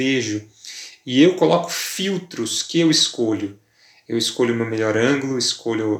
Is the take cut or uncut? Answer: uncut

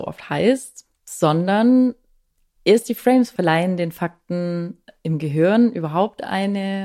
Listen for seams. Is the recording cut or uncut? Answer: cut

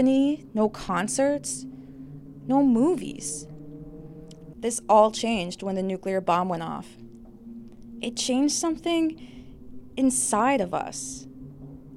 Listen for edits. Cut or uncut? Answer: cut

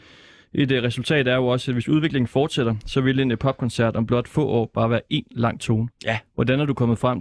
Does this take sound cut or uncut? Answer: uncut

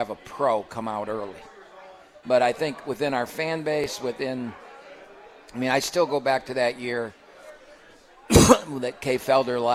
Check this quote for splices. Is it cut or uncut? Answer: cut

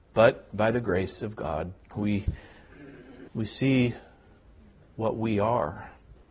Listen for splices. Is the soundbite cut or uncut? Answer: cut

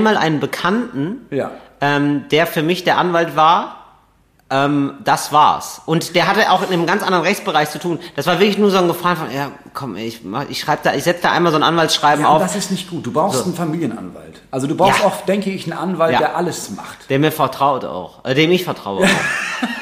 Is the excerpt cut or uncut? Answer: uncut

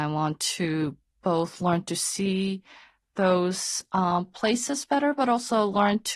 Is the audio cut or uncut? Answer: uncut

